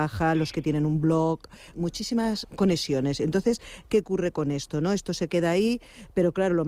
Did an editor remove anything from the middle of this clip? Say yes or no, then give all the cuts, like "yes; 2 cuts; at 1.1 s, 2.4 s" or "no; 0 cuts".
yes; 1 cut; at 1.7 s